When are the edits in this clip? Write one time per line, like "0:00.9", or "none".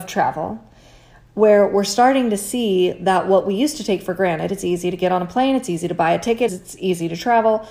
0:06.5